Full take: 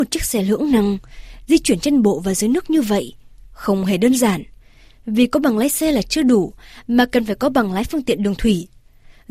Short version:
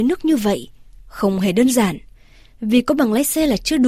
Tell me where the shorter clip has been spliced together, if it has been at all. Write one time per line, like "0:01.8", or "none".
none